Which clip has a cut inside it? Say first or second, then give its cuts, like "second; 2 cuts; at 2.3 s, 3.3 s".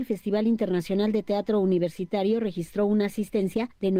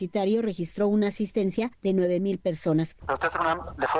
second; 1 cut; at 3.0 s